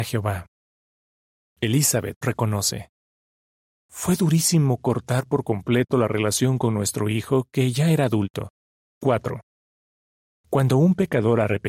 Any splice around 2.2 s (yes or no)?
yes